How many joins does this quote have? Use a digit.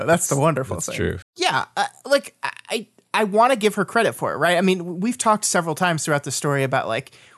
1